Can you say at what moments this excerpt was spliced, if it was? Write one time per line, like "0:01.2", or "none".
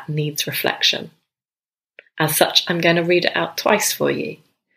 none